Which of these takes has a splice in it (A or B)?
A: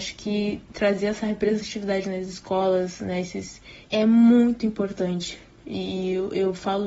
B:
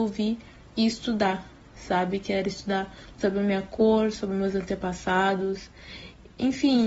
A